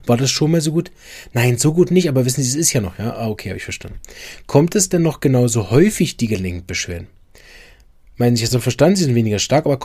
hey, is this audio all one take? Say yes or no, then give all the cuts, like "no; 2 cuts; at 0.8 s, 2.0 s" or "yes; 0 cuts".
yes; 0 cuts